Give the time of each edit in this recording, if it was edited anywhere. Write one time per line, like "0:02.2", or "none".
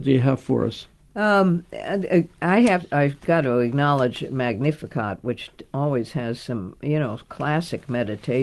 none